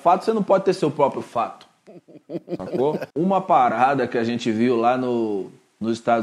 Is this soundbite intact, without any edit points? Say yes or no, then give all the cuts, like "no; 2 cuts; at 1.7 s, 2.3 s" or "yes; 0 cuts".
no; 1 cut; at 3.1 s